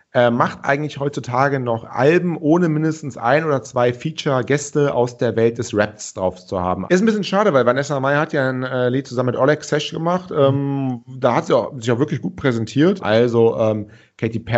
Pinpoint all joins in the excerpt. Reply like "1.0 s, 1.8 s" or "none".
6.9 s, 13.0 s